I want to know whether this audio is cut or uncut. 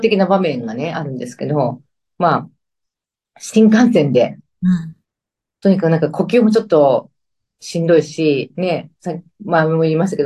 uncut